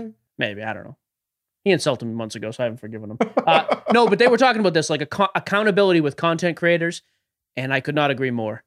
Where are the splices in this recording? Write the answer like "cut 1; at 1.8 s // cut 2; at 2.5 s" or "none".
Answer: none